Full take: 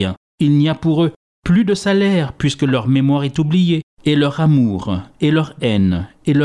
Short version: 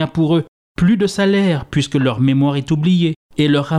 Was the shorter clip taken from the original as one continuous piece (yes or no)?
yes